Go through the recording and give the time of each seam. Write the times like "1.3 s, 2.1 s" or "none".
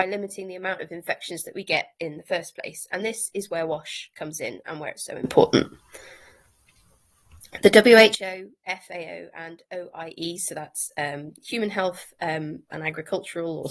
12.7 s

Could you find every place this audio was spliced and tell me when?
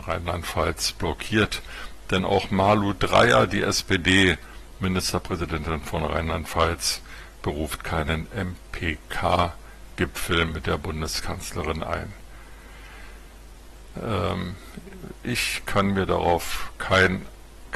13.9 s

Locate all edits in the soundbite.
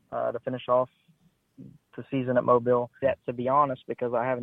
3.0 s

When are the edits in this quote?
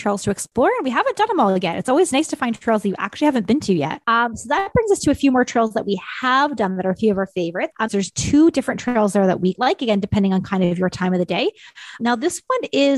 7.9 s, 9.5 s, 12.0 s

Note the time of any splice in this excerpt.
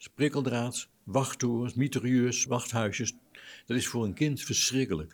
2.5 s

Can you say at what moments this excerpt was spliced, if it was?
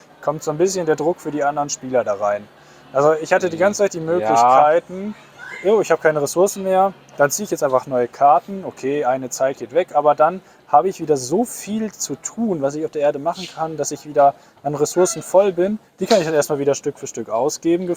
none

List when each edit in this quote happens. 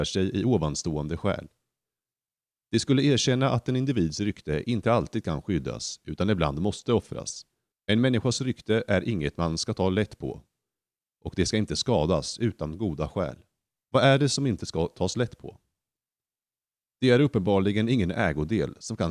7.7 s, 13.8 s

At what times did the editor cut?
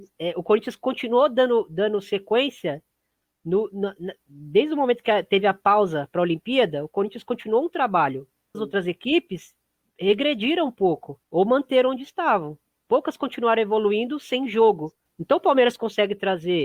8.5 s, 11.2 s, 15.1 s

